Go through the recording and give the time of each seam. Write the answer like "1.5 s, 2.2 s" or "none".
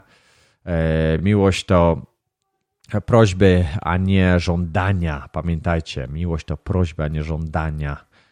none